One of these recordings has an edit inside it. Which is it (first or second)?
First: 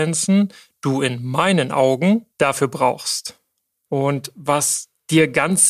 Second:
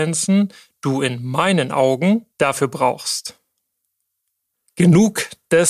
first